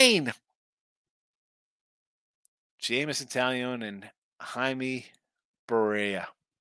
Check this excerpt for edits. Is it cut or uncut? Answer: uncut